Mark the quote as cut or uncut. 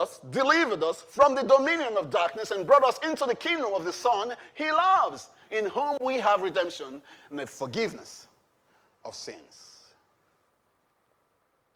uncut